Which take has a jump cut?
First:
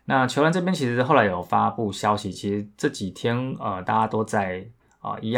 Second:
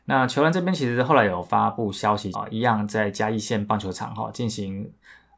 second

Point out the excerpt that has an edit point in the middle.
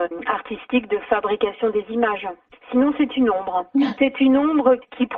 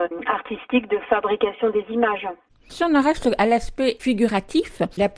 first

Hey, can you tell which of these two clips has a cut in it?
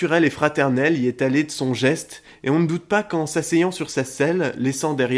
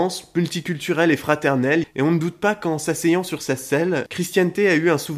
second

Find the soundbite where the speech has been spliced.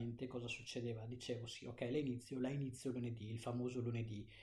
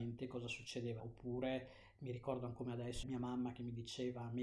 second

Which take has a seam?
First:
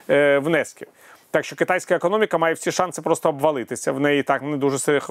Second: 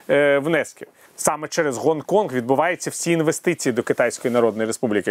second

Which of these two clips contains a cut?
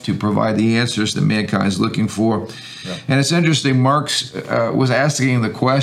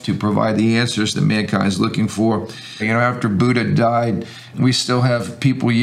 second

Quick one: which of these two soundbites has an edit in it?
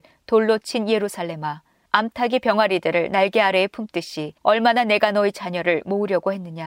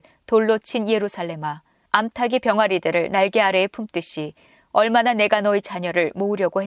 first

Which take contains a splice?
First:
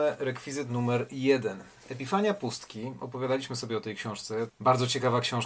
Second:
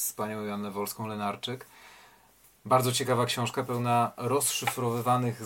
first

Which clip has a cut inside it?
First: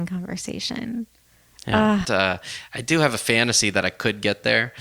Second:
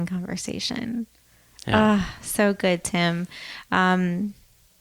first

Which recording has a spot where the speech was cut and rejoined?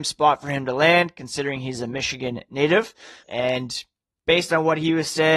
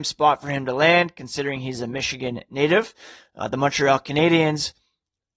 first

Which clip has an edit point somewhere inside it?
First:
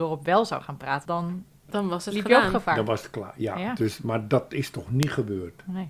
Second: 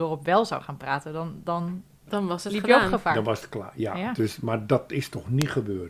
first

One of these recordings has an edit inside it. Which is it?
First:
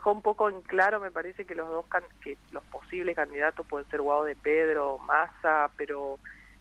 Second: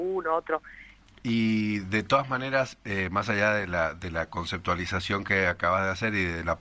second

